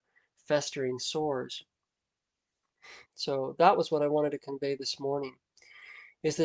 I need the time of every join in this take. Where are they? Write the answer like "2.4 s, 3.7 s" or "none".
3.1 s